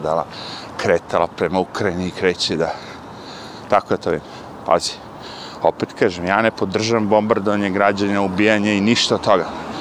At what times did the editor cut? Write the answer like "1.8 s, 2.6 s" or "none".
none